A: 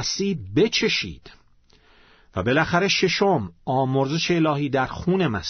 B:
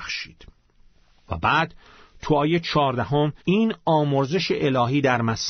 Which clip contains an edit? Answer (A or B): B